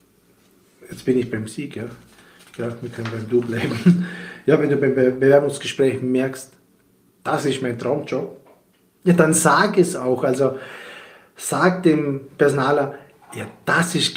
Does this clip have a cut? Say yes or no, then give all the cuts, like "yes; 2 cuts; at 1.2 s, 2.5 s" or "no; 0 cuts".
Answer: no; 0 cuts